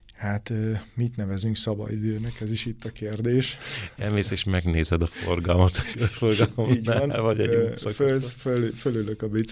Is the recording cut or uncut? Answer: uncut